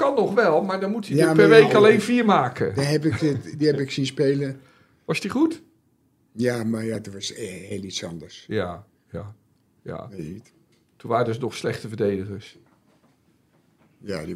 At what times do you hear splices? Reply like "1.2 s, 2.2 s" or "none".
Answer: none